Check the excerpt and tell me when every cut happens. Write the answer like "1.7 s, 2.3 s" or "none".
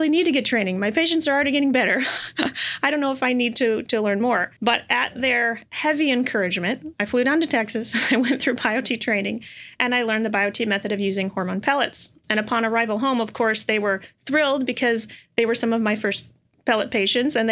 4.6 s